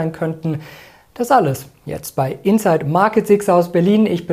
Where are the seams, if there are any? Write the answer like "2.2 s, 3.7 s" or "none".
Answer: none